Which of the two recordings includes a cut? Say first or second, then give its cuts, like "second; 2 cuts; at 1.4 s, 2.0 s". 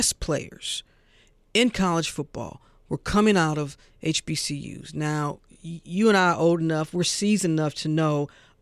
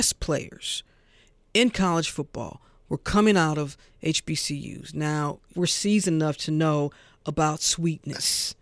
second; 1 cut; at 5.5 s